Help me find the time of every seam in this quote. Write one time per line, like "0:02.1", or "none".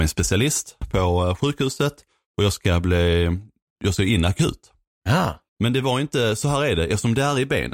0:05.5